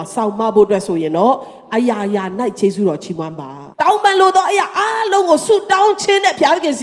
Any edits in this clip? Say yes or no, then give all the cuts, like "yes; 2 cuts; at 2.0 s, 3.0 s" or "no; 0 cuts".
yes; 1 cut; at 3.7 s